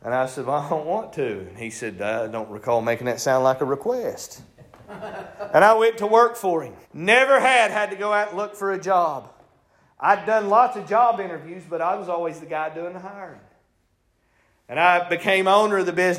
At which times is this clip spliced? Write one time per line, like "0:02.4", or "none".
0:06.8